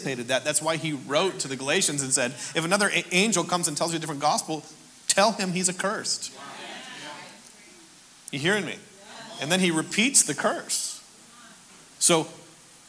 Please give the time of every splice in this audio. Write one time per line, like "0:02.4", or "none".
0:12.0